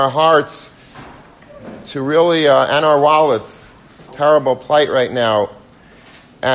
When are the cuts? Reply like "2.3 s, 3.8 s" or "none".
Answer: 4.1 s

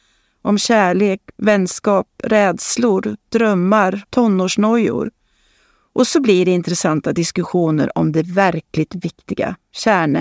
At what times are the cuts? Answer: 4.0 s

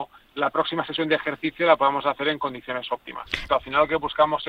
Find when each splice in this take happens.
3.5 s

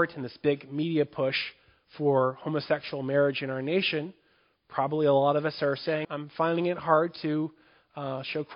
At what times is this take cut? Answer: 6.0 s

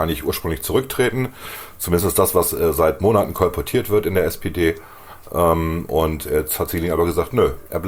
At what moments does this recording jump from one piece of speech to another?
none

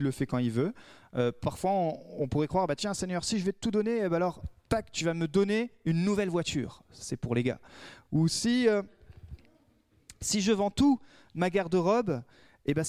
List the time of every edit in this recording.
none

